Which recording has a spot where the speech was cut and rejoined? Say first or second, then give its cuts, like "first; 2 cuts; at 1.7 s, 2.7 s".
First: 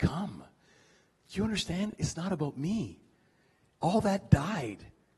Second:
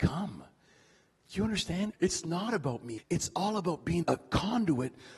second; 3 cuts; at 1.9 s, 3.0 s, 4.0 s